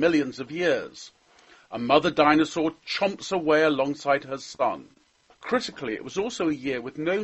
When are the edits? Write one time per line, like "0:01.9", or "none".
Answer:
0:05.3